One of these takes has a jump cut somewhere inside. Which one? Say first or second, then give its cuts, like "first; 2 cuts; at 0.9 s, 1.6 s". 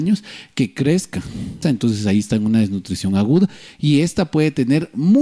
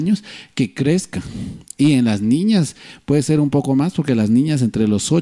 first; 1 cut; at 1.6 s